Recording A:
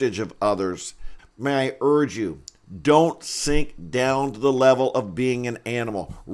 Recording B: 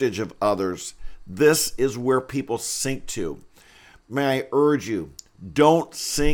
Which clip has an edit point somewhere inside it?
A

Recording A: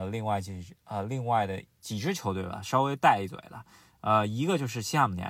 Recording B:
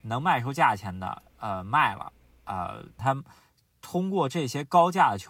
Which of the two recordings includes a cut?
B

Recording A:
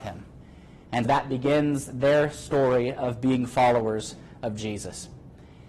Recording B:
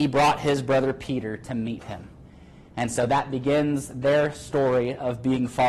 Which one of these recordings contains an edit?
A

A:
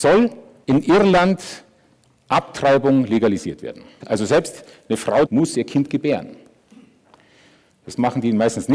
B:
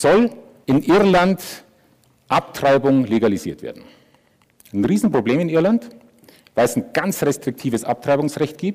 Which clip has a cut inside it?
A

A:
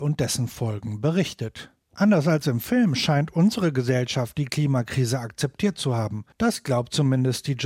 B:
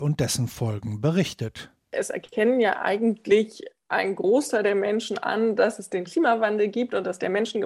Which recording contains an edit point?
A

